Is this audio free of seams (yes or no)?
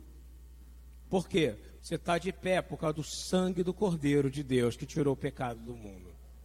no